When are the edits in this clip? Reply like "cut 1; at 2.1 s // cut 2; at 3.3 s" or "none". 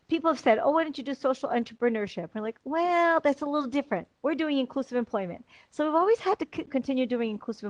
cut 1; at 4.2 s // cut 2; at 6.7 s